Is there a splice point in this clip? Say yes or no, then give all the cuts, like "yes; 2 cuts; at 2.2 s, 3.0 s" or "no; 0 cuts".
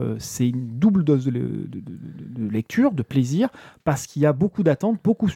no; 0 cuts